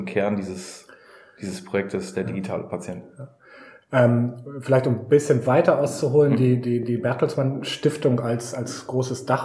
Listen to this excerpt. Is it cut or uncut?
uncut